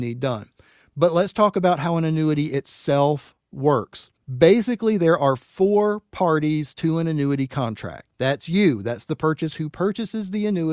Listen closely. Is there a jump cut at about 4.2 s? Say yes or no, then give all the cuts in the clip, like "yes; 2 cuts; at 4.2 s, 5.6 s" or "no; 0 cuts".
yes; 2 cuts; at 4.2 s, 8.1 s